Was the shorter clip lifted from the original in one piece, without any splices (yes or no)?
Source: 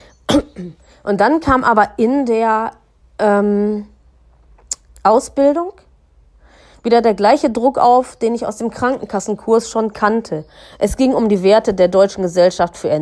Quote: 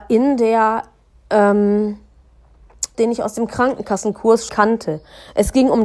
no